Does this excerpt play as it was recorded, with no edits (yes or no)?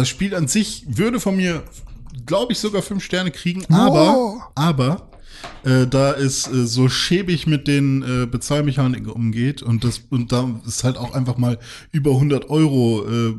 yes